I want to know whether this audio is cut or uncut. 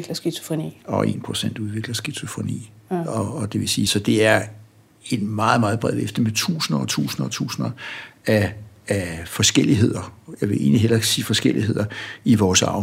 uncut